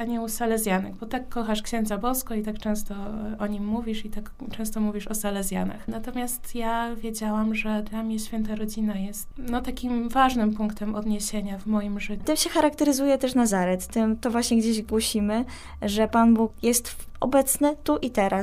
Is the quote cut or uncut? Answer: cut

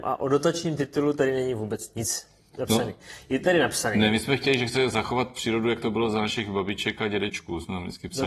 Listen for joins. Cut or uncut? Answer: uncut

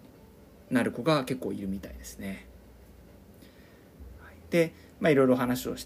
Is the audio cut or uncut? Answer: uncut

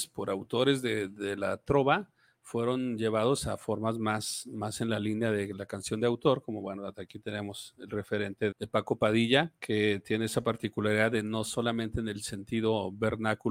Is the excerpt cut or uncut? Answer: cut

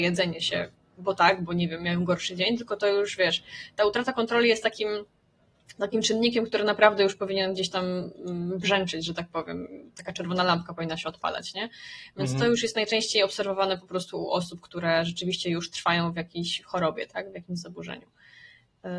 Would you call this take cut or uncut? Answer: uncut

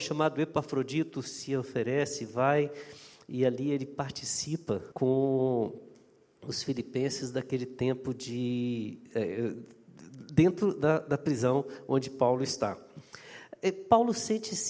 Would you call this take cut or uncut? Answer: cut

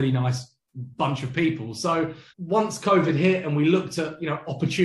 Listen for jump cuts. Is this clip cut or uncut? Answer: cut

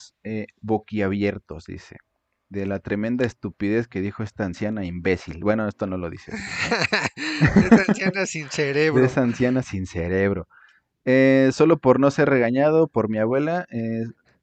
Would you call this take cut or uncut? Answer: uncut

